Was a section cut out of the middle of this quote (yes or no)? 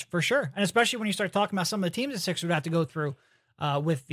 no